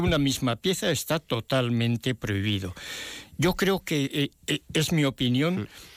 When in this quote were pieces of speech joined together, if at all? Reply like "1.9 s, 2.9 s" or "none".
none

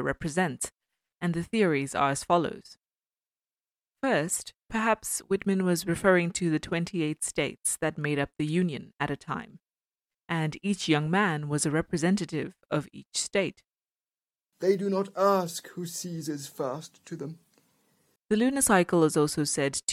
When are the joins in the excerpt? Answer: 14.5 s, 18.2 s

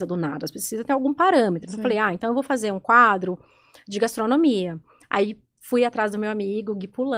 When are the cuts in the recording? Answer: none

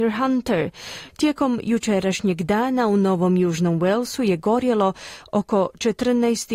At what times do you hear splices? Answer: 1.1 s

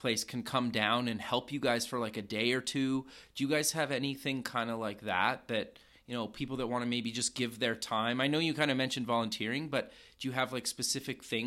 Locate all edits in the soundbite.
none

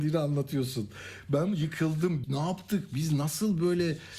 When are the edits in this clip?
2.2 s

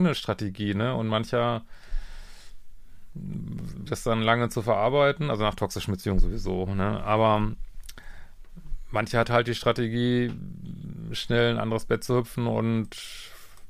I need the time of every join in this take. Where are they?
3.9 s

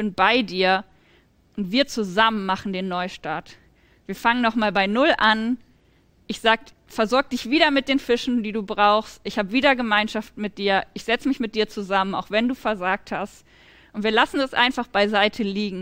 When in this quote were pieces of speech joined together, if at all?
none

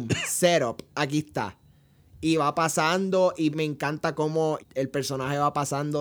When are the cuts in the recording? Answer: 3.5 s, 4.6 s

